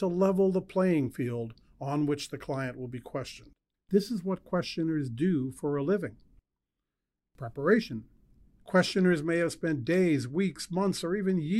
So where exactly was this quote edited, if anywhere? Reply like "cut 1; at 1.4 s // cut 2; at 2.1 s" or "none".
cut 1; at 3.7 s